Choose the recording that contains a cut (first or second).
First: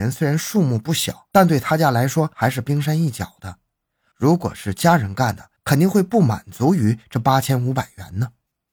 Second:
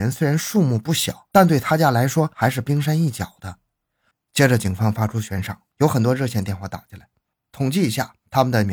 second